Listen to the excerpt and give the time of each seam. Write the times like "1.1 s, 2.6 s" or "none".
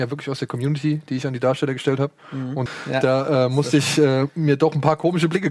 2.7 s